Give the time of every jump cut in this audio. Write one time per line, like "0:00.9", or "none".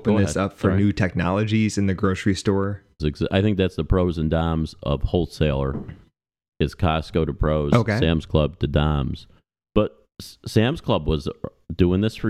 0:03.0